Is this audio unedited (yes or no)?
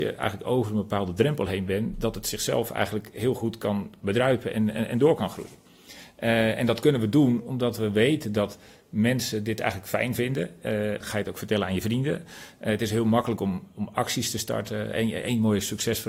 no